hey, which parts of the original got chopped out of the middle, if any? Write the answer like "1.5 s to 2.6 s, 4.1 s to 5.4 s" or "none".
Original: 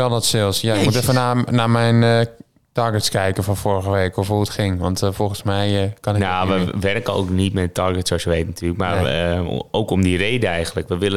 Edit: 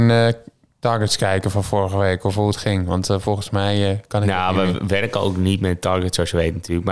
none